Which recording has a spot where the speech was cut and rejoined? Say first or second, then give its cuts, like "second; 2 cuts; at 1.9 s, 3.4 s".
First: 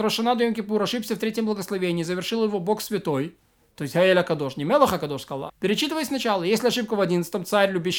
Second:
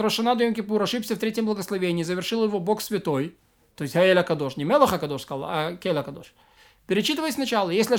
first; 1 cut; at 5.5 s